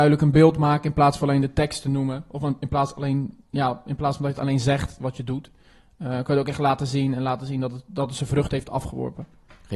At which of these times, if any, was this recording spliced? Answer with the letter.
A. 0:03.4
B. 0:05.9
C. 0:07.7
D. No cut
D